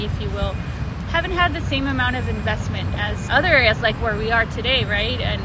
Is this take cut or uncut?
cut